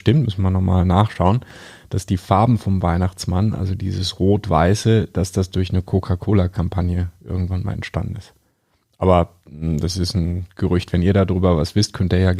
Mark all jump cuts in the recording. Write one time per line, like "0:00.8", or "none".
none